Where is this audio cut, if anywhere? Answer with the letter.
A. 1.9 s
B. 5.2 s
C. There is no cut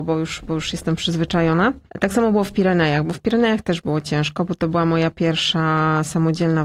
A